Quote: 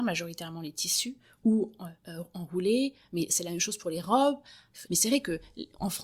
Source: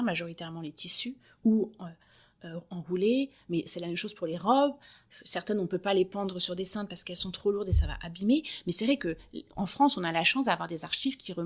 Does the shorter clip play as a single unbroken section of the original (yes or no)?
no